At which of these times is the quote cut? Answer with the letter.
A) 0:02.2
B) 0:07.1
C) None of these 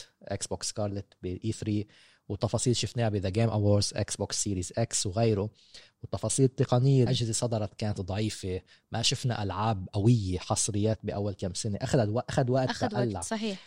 B